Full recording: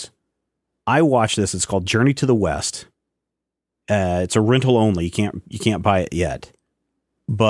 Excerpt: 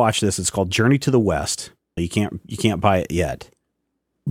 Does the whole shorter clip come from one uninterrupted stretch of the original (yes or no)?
no